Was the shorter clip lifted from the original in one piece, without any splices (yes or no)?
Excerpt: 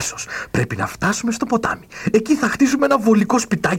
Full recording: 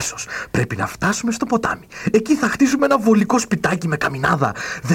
yes